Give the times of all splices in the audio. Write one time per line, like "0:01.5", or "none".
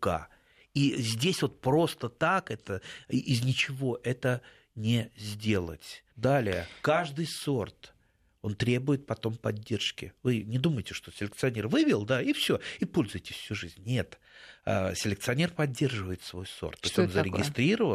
0:06.1